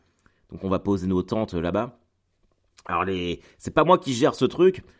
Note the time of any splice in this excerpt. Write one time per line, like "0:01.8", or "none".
none